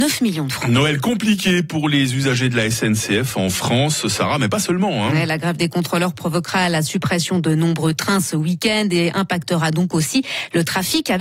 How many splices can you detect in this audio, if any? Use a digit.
0